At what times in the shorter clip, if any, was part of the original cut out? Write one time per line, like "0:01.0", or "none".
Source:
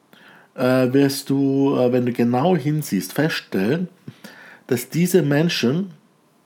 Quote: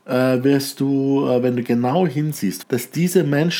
0:02.6